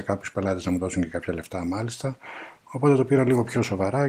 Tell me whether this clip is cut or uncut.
uncut